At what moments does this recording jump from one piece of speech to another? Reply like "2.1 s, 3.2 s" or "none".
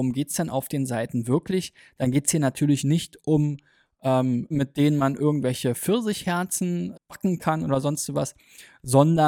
4.5 s, 6.9 s

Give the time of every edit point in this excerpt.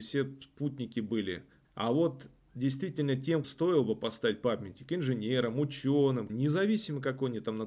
1.6 s, 3.4 s, 6.3 s

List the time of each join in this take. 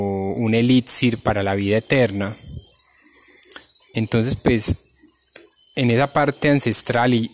none

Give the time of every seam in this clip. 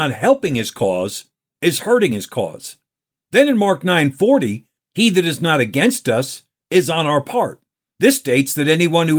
4.8 s

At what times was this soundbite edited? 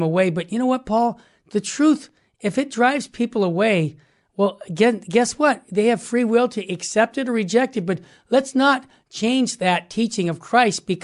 none

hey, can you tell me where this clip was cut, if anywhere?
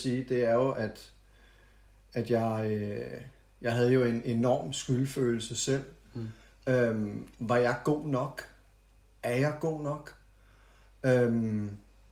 none

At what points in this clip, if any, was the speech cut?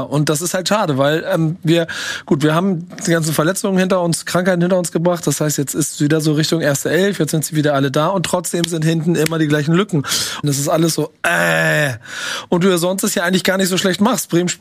10.4 s

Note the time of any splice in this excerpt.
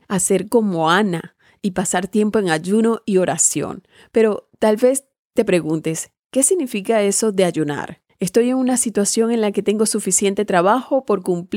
none

